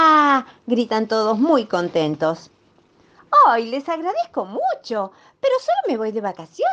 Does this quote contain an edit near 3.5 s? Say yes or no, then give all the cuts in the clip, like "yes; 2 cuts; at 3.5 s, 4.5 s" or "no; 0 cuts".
no; 0 cuts